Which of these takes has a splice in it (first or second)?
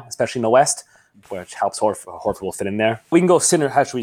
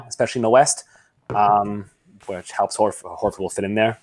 first